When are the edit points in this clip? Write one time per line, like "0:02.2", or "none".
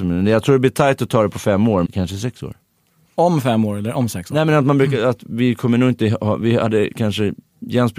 0:01.9